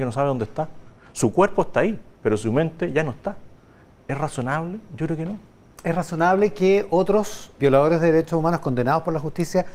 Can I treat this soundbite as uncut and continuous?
no; 1 cut; at 7.6 s

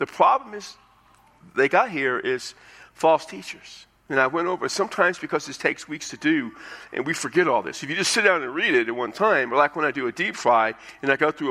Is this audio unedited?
yes; 0 cuts

